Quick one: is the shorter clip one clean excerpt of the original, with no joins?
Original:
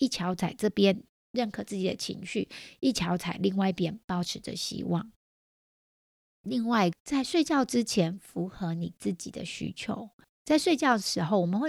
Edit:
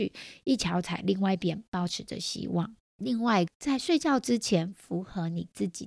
no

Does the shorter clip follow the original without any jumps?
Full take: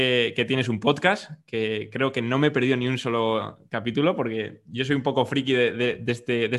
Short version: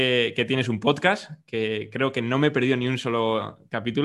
yes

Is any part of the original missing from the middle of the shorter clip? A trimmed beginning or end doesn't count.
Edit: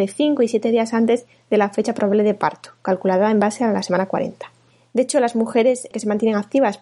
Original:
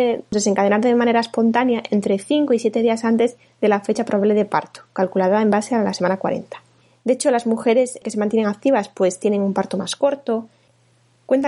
no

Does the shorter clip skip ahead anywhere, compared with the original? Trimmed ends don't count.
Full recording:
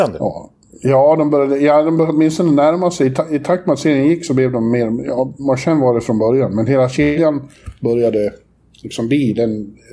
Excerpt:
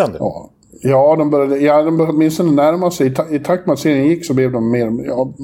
no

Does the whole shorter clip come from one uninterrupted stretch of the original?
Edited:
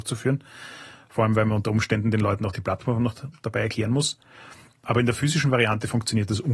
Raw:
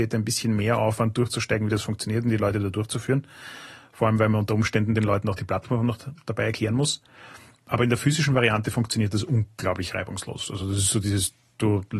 yes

